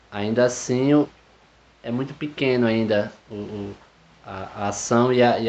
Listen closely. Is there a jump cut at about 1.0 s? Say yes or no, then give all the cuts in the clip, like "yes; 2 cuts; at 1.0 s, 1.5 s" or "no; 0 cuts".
yes; 1 cut; at 1.0 s